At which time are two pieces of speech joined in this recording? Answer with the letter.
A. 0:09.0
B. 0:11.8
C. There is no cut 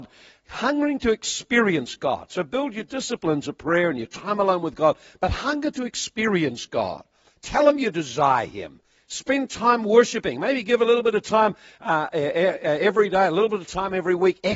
C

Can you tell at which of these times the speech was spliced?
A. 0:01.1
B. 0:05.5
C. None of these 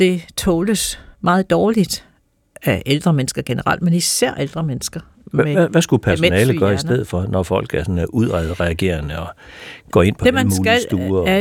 A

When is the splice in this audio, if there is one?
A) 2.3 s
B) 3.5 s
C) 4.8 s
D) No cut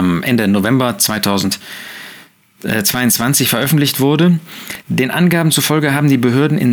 D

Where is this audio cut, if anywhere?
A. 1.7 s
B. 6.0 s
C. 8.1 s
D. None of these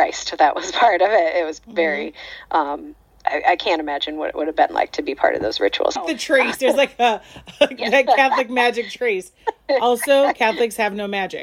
B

